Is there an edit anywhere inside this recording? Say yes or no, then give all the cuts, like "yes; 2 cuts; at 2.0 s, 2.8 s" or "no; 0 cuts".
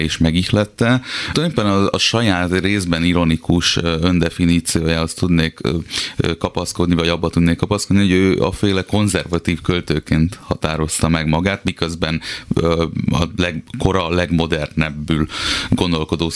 no; 0 cuts